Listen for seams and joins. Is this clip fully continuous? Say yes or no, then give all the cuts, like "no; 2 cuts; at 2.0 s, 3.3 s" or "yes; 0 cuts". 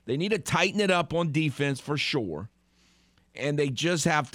yes; 0 cuts